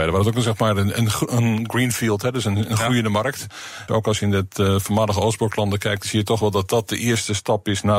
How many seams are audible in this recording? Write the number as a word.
one